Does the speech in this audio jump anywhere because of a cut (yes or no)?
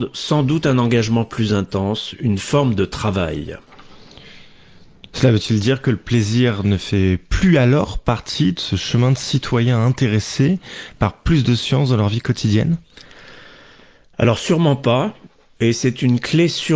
no